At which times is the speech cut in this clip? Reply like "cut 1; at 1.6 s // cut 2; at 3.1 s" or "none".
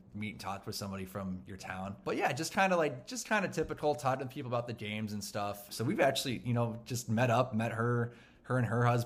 cut 1; at 5.7 s